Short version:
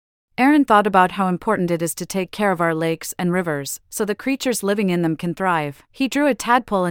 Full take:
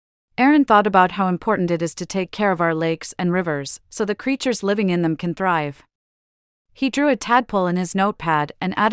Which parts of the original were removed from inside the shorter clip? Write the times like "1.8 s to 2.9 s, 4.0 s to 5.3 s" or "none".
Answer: 5.9 s to 6.7 s